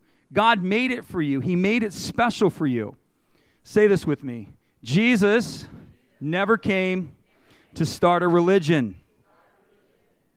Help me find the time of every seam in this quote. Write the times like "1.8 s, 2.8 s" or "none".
none